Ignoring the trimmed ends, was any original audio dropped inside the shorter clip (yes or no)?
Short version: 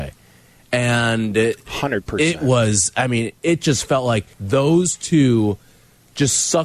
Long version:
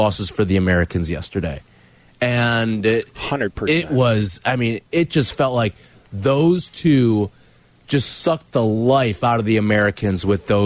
yes